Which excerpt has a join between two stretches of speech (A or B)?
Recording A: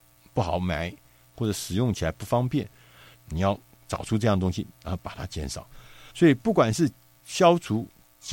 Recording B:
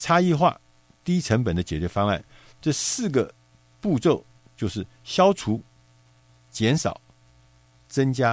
A